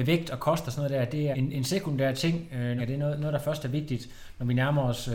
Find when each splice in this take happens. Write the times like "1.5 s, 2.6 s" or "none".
1.3 s, 2.8 s